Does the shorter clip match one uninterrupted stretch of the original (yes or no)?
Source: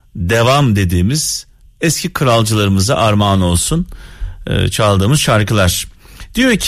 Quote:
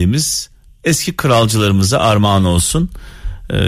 yes